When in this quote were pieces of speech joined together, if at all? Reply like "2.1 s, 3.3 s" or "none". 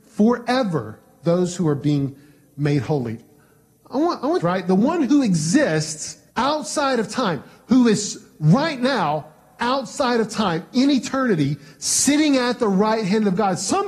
4.4 s, 6.3 s